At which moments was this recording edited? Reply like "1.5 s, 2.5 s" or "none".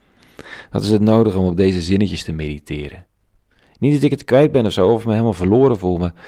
none